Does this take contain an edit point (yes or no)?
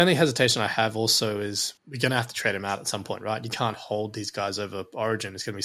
yes